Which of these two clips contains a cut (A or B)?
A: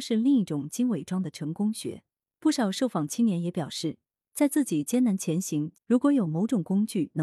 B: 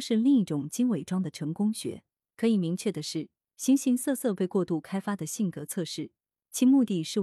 A